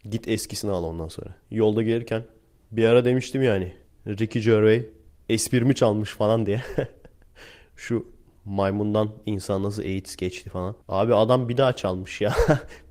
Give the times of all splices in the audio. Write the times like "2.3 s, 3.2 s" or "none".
1.4 s, 10.8 s